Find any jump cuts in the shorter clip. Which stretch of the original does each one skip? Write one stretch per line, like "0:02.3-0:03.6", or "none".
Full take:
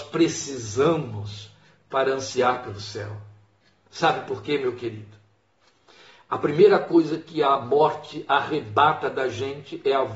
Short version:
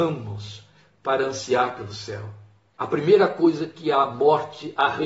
0:03.6-0:06.3